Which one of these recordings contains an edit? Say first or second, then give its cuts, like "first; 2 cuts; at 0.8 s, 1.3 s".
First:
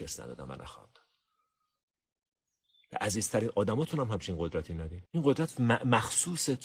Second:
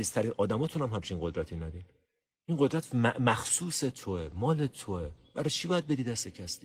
first; 1 cut; at 5.1 s